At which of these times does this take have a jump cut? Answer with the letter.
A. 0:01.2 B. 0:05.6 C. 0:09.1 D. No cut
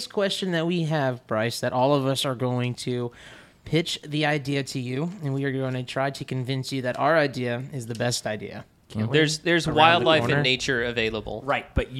C